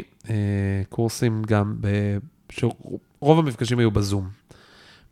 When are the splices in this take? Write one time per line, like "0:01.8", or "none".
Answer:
none